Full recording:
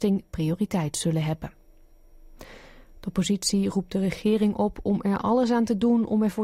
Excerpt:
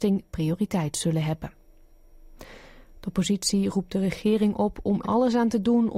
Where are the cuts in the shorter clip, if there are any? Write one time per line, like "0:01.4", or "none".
0:05.0